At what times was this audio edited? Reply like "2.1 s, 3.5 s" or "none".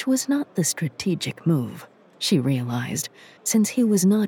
3.4 s